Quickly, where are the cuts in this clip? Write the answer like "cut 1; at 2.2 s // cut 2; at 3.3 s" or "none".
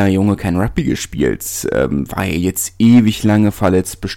none